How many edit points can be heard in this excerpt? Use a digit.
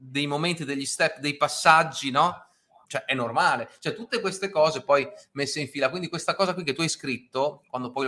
1